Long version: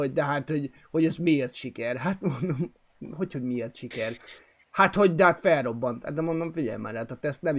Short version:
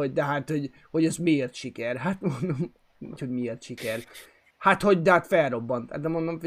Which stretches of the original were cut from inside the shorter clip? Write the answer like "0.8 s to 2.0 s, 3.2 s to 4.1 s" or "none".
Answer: 3.2 s to 3.3 s